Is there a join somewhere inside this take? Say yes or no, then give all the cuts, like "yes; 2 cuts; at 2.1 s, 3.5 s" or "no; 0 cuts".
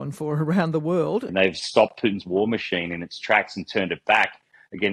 yes; 1 cut; at 1.3 s